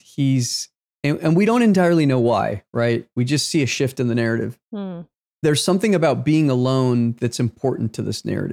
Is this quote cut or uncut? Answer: uncut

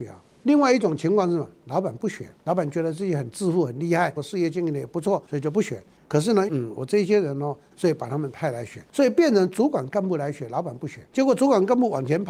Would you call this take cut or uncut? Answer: cut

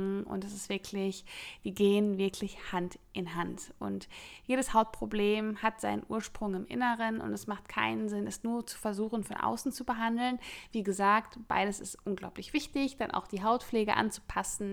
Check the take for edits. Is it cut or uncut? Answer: uncut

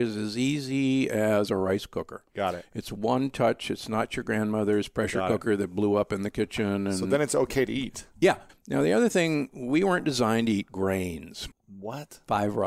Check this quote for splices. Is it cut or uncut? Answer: cut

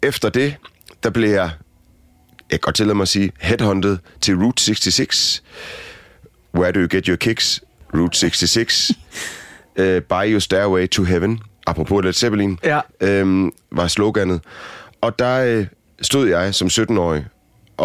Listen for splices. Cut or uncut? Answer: uncut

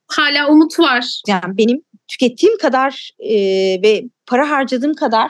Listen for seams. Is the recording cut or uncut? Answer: cut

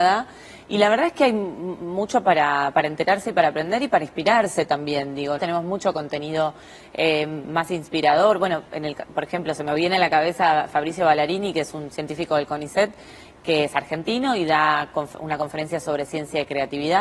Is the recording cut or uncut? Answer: cut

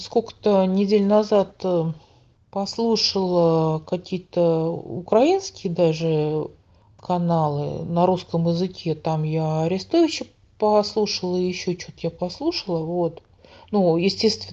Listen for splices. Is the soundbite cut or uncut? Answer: uncut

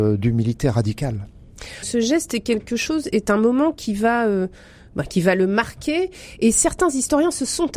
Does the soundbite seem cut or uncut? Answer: uncut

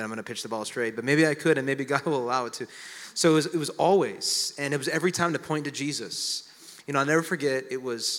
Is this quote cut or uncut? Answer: uncut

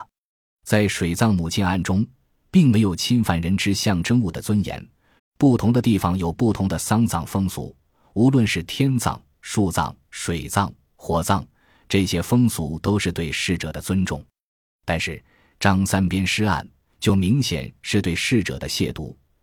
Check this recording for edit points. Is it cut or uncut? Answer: cut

